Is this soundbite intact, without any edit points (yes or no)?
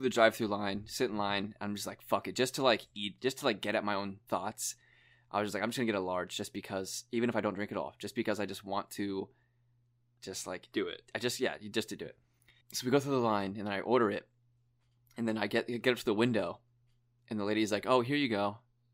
yes